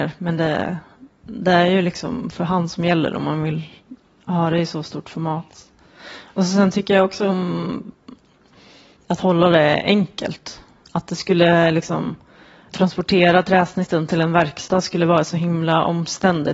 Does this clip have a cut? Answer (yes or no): no